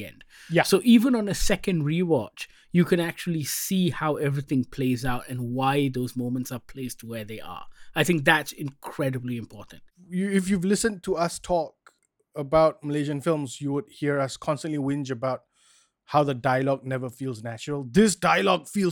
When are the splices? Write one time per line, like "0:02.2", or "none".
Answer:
none